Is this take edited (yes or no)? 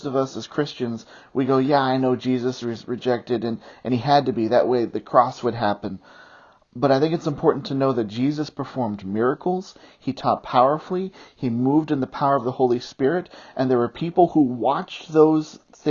no